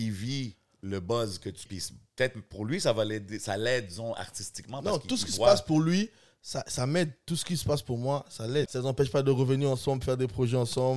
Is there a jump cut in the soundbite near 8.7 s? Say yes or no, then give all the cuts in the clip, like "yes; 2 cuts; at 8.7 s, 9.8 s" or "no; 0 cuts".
yes; 2 cuts; at 1.7 s, 8.7 s